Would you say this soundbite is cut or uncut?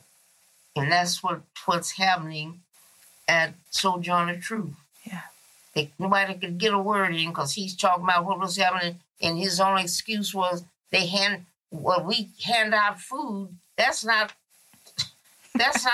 cut